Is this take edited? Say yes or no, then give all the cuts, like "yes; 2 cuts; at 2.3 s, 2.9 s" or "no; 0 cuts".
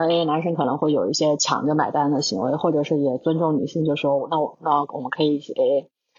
no; 0 cuts